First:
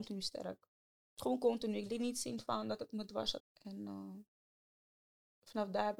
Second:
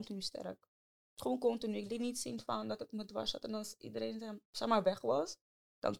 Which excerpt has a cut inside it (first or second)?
first